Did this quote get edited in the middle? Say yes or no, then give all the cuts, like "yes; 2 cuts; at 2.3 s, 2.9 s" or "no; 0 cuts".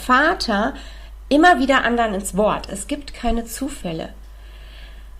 yes; 1 cut; at 2.7 s